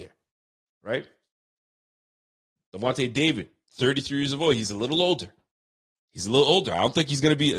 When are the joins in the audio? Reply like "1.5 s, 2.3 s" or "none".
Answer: none